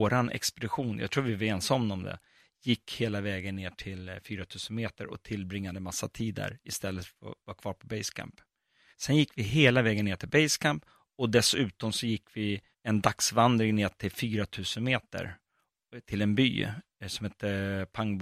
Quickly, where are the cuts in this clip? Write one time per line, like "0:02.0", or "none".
0:08.9
0:12.7